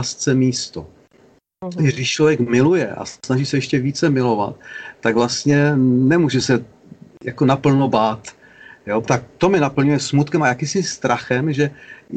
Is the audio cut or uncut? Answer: cut